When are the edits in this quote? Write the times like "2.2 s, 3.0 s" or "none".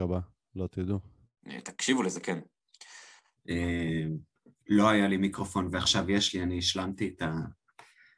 3.4 s